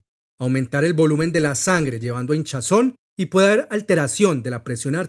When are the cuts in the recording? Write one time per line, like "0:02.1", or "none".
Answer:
none